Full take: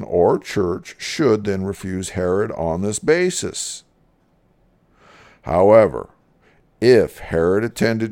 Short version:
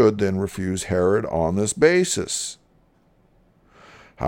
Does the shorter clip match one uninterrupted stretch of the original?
yes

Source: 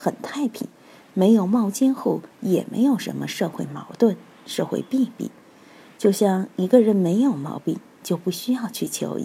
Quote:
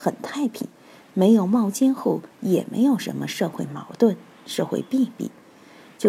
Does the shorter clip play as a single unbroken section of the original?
yes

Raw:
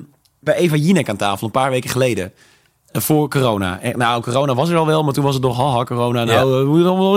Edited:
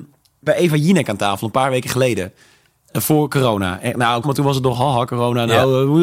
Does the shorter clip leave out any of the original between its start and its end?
yes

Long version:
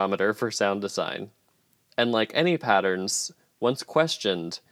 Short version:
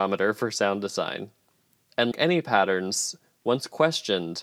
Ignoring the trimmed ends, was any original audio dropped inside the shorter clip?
yes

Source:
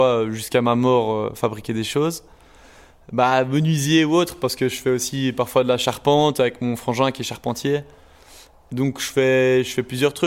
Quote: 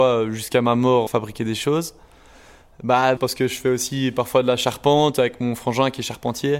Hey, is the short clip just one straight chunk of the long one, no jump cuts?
no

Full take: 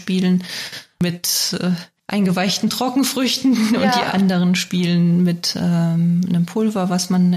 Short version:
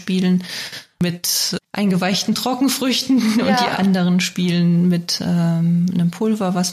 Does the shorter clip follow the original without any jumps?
no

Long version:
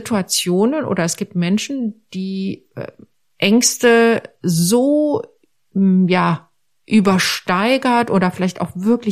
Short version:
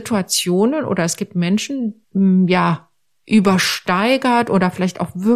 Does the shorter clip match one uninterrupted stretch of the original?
no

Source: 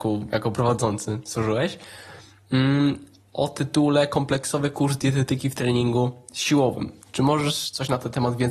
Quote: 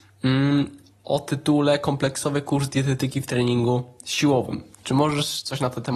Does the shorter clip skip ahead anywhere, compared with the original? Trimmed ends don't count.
no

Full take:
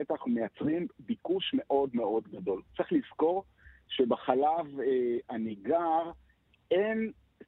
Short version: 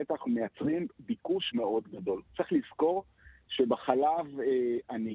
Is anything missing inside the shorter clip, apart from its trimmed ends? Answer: yes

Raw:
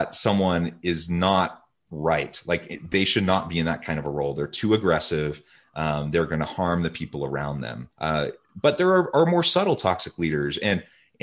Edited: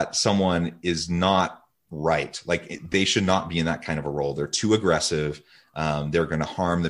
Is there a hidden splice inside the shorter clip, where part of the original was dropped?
no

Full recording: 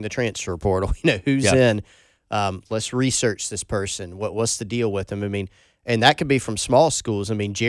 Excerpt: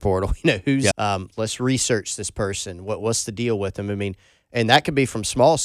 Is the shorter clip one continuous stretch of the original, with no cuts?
no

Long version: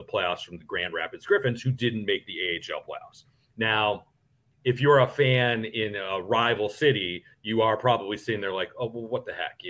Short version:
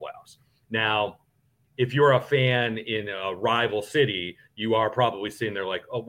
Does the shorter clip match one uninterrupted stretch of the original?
yes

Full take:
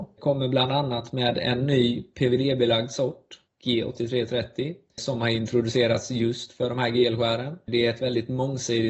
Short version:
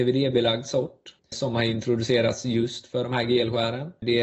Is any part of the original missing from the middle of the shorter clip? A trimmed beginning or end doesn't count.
yes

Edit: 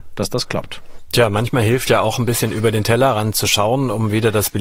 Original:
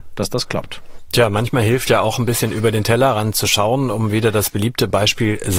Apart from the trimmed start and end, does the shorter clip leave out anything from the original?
no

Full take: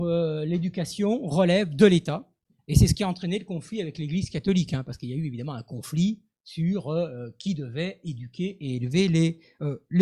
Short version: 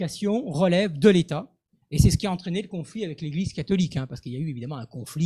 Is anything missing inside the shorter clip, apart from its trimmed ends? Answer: no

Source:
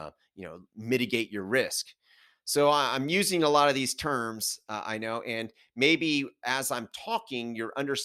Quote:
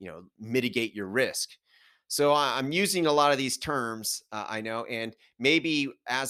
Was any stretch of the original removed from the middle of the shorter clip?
no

